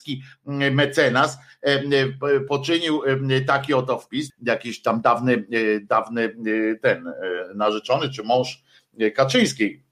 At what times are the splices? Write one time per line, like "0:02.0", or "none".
0:04.3